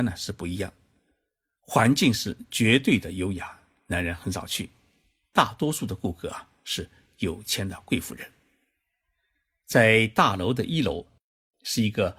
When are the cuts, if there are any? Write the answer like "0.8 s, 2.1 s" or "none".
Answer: 9.6 s